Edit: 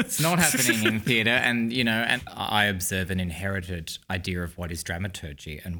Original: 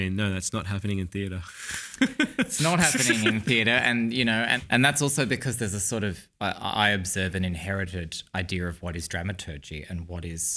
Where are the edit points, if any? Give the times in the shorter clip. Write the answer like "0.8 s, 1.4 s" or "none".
2.3 s